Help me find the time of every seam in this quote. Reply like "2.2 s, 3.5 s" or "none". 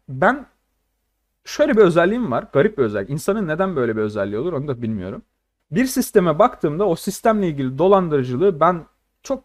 none